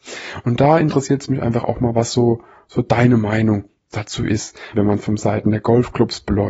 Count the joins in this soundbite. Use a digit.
1